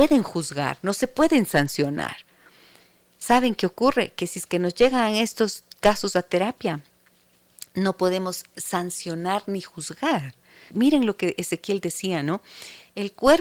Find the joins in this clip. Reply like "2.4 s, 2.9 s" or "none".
10.7 s